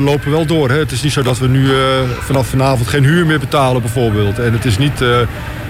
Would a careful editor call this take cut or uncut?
uncut